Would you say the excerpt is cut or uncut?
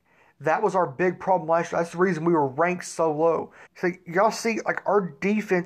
cut